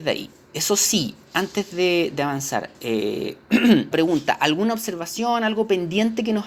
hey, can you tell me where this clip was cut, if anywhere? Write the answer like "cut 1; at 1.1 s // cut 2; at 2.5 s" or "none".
cut 1; at 3.9 s